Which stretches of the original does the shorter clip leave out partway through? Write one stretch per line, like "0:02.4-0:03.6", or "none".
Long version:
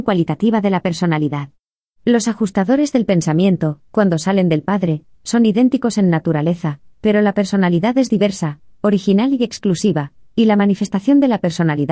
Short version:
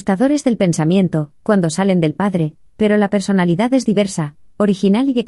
0:05.2-0:06.9